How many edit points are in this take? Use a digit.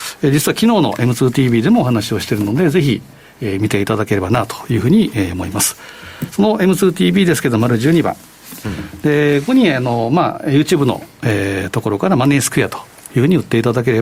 1